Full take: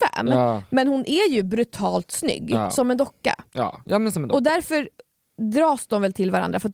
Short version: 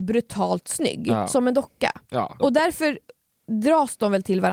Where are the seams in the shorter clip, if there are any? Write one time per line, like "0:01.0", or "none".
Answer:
0:02.4

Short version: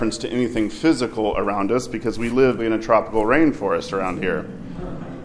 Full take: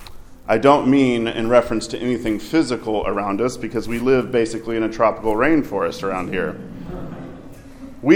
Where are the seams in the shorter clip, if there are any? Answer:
0:02.6

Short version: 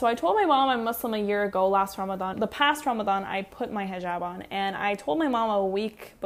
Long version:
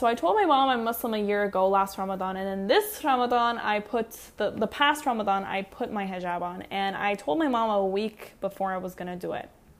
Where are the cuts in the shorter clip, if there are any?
0:02.3

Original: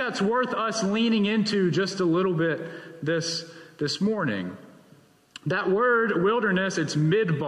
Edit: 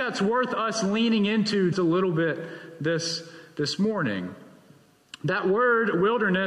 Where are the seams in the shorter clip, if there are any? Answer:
0:01.7

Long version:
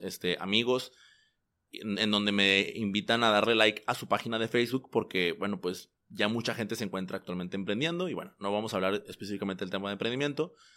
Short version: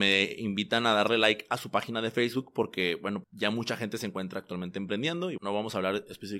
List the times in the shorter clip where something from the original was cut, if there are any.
0:03.2
0:05.4

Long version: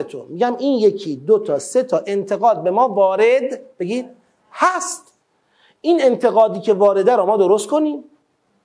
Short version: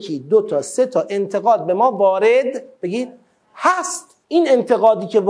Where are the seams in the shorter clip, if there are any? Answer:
0:04.2

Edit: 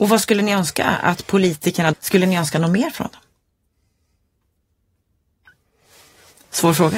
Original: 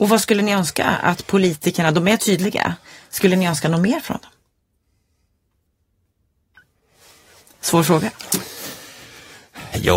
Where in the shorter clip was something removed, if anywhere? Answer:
0:01.9

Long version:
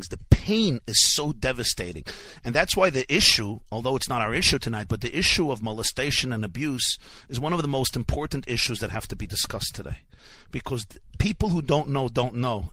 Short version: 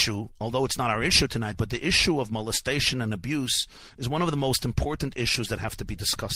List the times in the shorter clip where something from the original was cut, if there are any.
none

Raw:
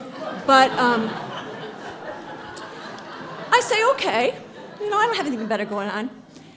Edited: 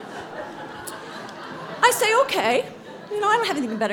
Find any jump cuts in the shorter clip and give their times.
none

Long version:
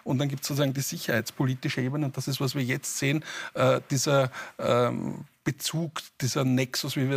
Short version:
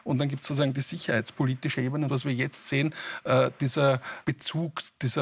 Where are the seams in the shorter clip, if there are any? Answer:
0:02.1
0:04.2

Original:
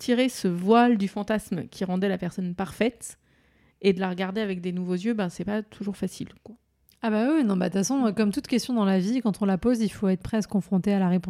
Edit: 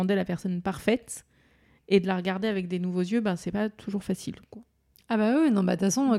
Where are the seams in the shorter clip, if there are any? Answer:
none

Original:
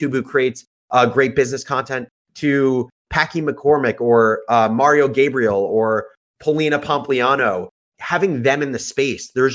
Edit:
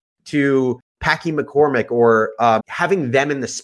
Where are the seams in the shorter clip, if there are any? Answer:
0:02.6

